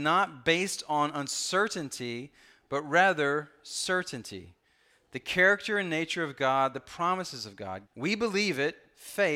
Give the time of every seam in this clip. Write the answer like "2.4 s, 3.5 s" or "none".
6.7 s, 7.8 s